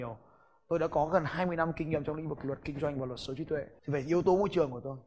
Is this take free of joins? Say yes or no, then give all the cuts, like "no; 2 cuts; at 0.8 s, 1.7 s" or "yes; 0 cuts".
no; 1 cut; at 3.8 s